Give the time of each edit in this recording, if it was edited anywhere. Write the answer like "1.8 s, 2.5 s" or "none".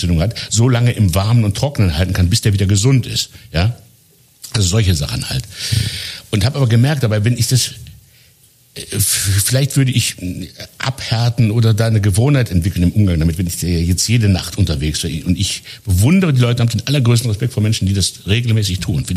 none